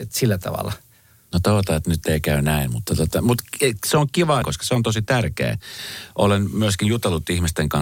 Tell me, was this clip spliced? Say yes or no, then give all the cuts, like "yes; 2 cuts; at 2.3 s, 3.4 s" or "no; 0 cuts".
yes; 2 cuts; at 2.9 s, 4.4 s